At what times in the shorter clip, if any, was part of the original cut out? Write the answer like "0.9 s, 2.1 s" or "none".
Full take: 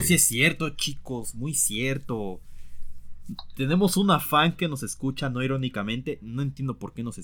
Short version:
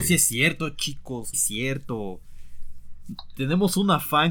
1.3 s